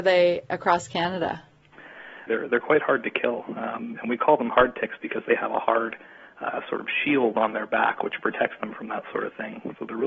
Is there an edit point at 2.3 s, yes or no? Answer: yes